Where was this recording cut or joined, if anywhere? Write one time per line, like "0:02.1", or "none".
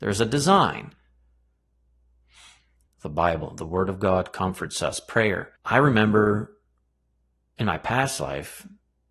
0:02.9
0:05.6